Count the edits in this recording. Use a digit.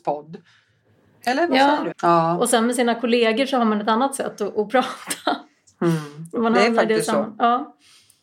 1